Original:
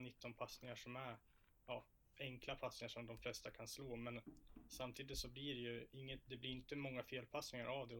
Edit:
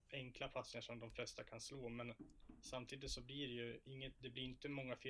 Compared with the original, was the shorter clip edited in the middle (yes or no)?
no